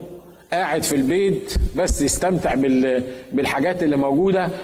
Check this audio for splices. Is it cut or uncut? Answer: uncut